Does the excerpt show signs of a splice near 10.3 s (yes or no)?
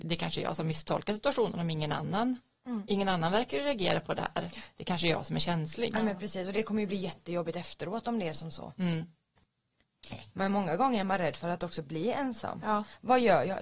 yes